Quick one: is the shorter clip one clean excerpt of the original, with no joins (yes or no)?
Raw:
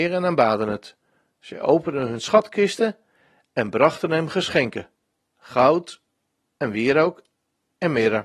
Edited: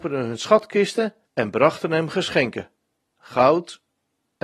no